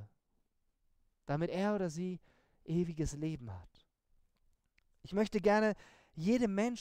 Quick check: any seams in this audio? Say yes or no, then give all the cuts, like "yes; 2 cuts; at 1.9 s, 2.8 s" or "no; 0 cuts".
no; 0 cuts